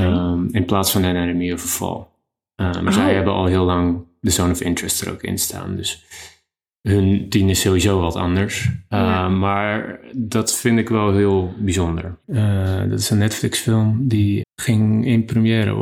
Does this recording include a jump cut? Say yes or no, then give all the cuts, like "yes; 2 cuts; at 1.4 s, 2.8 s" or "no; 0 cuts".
yes; 2 cuts; at 12.2 s, 14.4 s